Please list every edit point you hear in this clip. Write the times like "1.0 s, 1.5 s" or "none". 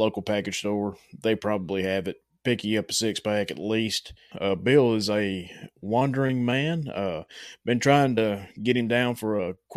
4.3 s